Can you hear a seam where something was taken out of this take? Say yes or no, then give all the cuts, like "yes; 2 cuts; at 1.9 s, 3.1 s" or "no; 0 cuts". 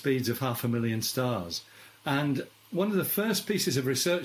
no; 0 cuts